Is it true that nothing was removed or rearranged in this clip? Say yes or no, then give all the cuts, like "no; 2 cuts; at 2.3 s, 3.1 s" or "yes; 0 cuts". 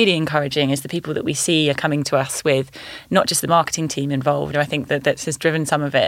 no; 1 cut; at 4.5 s